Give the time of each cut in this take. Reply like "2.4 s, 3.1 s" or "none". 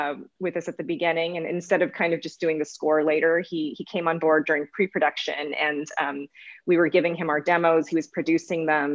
none